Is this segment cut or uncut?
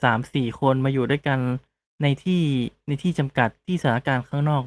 uncut